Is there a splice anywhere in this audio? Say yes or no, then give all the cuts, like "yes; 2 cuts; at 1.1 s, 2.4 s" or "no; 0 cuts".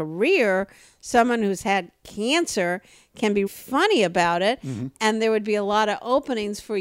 yes; 1 cut; at 3.5 s